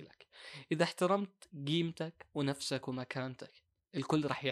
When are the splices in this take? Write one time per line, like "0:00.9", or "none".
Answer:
none